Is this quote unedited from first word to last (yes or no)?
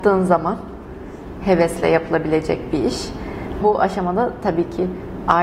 no